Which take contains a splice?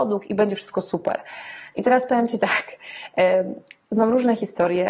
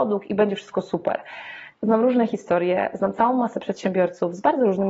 second; 1 cut; at 1.7 s

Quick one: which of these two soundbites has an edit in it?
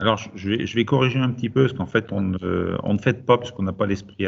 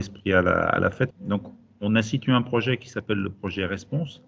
second; 1 cut; at 1.1 s

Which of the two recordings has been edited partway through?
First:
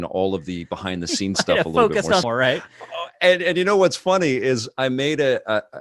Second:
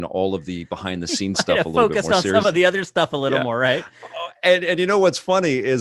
first; 1 cut; at 2.2 s

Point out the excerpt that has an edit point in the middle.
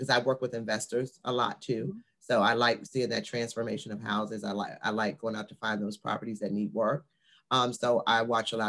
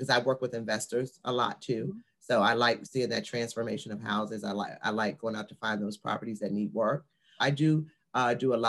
second; 1 cut; at 7.4 s

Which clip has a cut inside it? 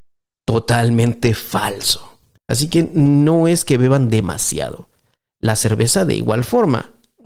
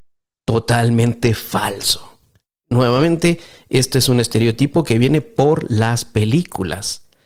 first; 1 cut; at 2.4 s

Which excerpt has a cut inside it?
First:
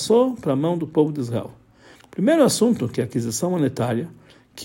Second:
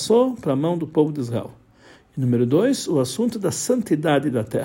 first; 1 cut; at 2.0 s

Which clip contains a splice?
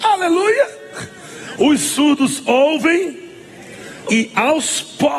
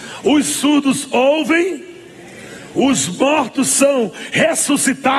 first; 2 cuts; at 1.6 s, 4.1 s

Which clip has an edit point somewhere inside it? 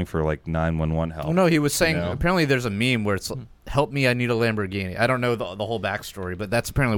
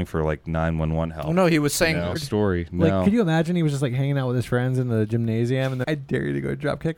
second; 2 cuts; at 2.1 s, 5.8 s

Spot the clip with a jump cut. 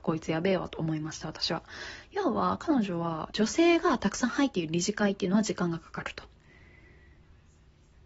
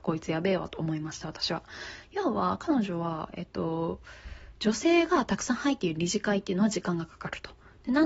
first; 2 cuts; at 3.3 s, 6.3 s

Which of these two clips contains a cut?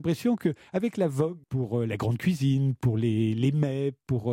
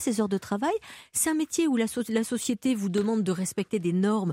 first; 1 cut; at 1.4 s

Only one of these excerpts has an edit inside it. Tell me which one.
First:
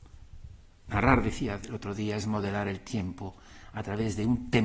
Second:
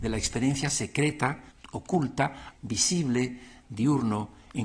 second; 3 cuts; at 1.5 s, 2.5 s, 3.6 s

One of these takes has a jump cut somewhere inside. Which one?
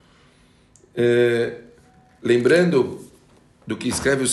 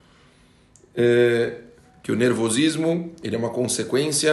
second; 1 cut; at 2.0 s

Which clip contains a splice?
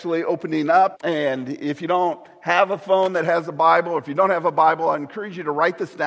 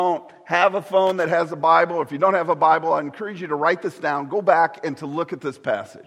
first; 1 cut; at 0.9 s

